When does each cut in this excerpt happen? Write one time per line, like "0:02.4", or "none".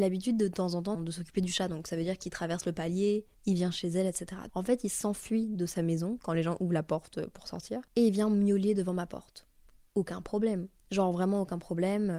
0:00.9
0:04.5